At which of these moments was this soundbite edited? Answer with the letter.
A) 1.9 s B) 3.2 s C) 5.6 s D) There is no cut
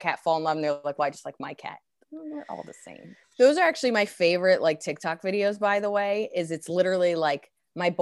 B